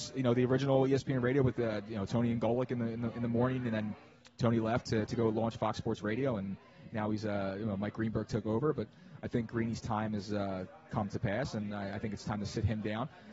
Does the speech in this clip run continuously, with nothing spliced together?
yes; 0 cuts

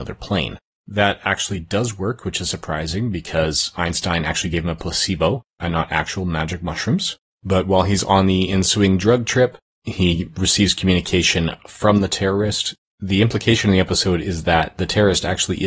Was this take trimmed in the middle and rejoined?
no; 0 cuts

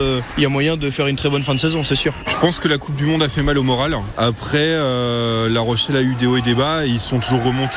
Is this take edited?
yes; 1 cut; at 2.3 s

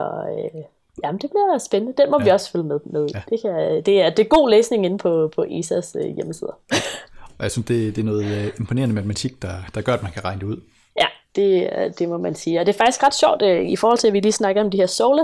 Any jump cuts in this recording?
no; 0 cuts

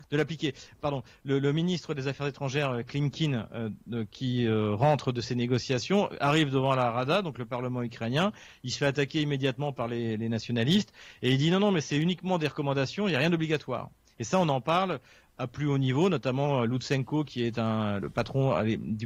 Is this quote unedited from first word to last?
no; 2 cuts; at 14.1 s, 18.0 s

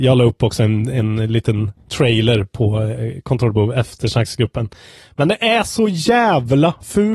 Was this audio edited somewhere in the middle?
no; 0 cuts

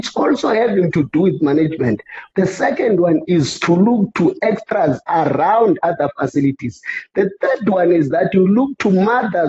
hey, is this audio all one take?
no; 1 cut; at 2.3 s

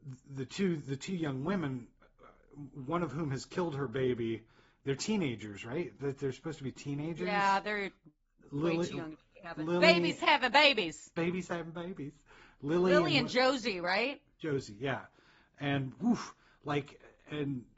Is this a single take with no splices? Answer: yes; 0 cuts

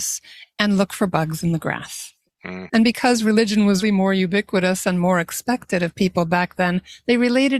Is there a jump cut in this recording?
yes; 2 cuts; at 2.7 s, 3.8 s

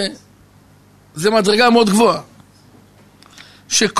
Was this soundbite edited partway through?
no; 0 cuts

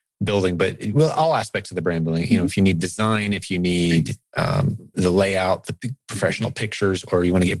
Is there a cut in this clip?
yes; 1 cut; at 4.9 s

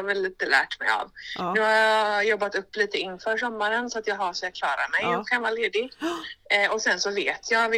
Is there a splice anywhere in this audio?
no; 0 cuts

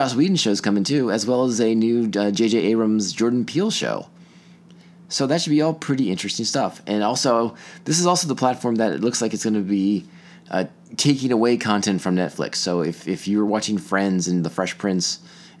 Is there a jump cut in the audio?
no; 0 cuts

